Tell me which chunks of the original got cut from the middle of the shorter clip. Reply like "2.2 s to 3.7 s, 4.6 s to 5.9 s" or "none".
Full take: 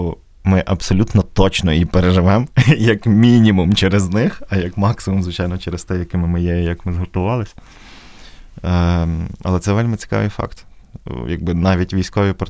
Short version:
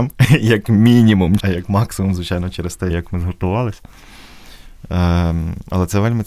3.8 s to 4.5 s, 6.0 s to 6.6 s